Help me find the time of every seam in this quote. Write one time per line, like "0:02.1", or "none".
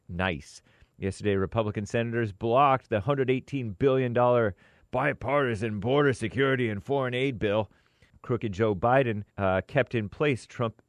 0:08.1
0:09.3